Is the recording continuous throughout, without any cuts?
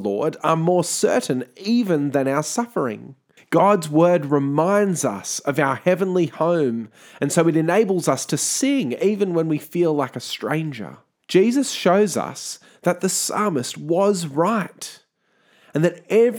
no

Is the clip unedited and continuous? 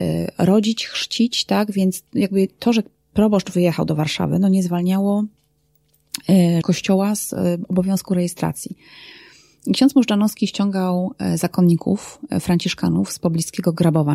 no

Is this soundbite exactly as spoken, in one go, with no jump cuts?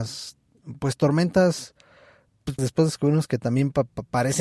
no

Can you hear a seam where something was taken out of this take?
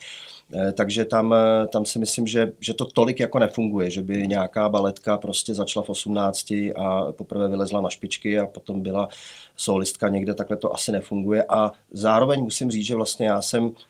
no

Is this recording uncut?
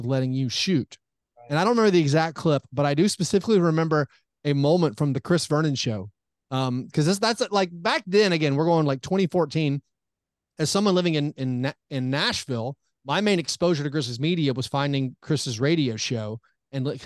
yes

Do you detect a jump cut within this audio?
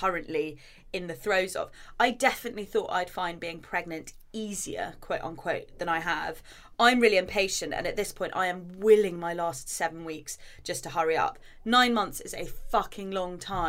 no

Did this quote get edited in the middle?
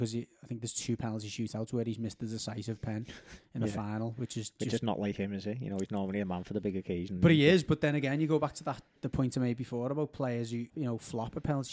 yes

